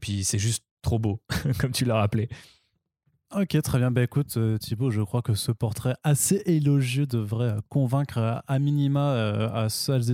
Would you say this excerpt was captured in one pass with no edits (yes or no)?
yes